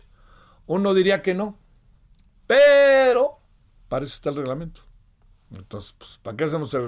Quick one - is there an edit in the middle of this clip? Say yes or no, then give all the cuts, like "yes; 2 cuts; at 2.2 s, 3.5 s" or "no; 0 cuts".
no; 0 cuts